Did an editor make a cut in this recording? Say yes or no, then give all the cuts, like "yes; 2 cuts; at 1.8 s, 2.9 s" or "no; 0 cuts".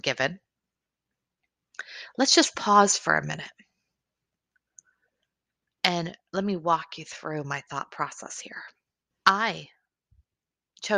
yes; 1 cut; at 9.1 s